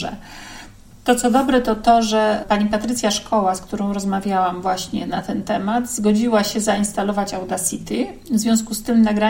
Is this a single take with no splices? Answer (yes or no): yes